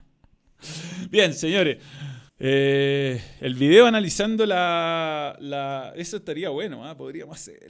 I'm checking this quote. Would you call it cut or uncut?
cut